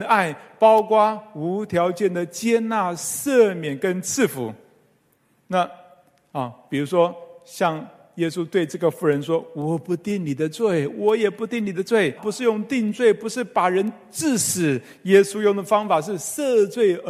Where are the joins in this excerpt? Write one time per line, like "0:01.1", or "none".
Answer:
0:12.2